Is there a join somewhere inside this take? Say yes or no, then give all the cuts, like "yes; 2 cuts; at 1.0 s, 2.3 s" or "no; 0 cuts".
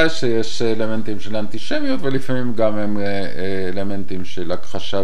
no; 0 cuts